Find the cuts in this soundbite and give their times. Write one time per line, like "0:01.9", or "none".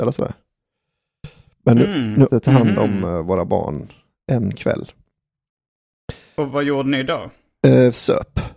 0:02.3